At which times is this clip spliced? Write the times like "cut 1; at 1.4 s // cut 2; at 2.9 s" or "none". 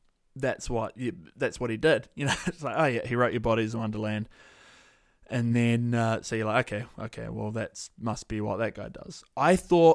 none